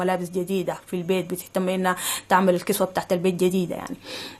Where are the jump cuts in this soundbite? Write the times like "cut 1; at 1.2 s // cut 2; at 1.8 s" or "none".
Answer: none